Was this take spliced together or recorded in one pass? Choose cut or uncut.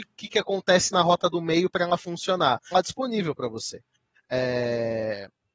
cut